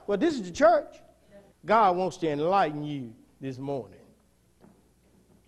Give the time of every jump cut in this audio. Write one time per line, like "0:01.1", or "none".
0:01.5